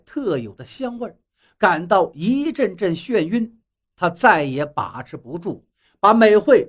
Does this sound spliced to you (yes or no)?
no